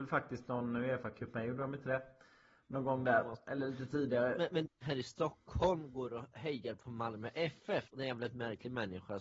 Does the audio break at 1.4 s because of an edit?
no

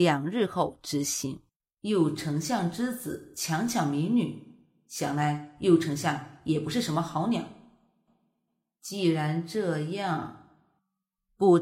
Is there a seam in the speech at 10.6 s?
no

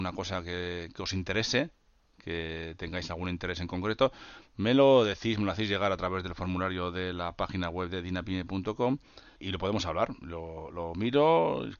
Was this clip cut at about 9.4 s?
yes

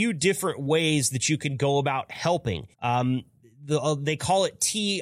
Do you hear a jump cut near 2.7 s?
yes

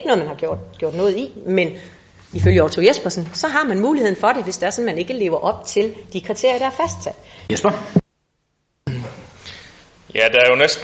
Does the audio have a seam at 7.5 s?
yes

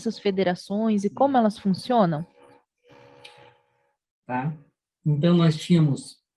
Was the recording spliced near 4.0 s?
yes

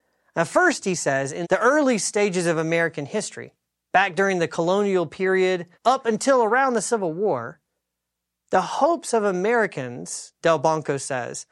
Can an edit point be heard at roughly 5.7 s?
yes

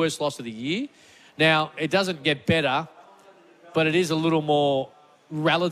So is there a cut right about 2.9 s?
no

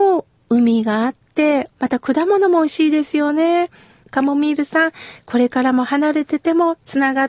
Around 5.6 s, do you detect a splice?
no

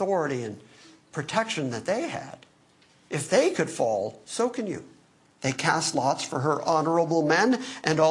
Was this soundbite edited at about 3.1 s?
no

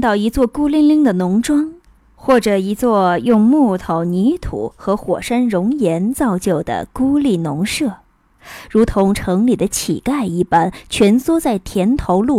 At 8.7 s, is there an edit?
no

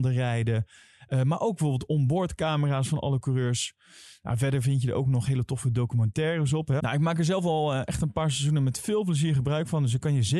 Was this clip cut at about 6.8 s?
yes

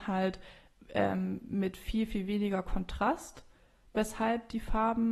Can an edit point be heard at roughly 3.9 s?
no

